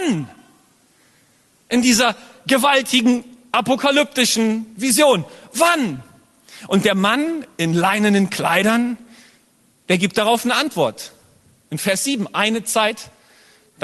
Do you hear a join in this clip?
no; 0 cuts

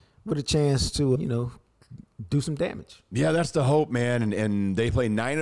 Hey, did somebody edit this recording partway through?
yes; 1 cut; at 1.1 s

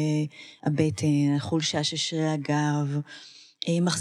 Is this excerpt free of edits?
yes; 0 cuts

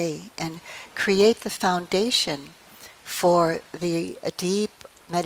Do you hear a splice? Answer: no; 0 cuts

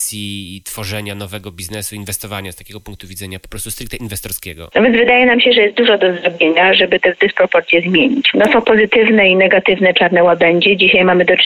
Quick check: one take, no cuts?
no; 2 cuts; at 4.7 s, 8.3 s

